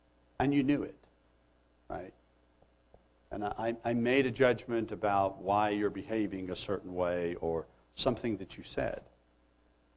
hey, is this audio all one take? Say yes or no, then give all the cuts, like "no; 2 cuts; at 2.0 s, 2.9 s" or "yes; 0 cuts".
yes; 0 cuts